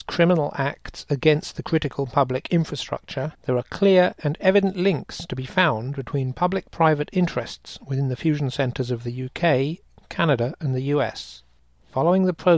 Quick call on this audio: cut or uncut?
cut